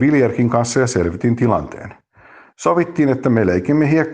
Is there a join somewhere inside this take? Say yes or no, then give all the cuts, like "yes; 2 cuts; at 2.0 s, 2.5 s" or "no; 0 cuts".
no; 0 cuts